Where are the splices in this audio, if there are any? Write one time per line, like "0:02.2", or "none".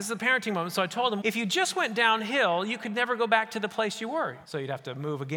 0:01.2
0:04.4